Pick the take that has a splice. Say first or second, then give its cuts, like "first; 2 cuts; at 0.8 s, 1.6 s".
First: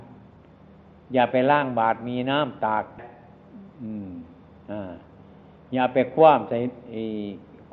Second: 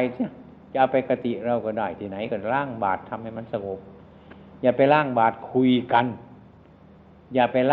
first; 1 cut; at 3.0 s